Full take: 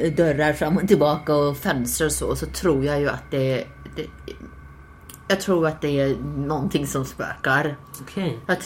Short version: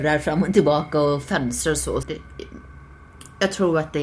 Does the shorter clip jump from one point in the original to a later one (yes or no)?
yes